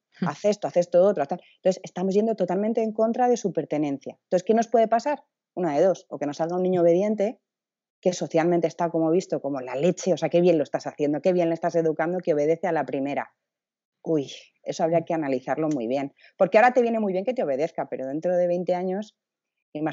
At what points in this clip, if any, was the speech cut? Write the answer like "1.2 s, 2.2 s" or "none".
none